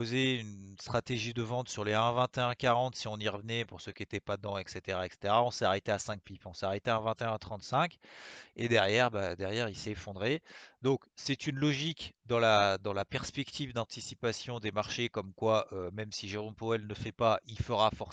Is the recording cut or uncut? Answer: uncut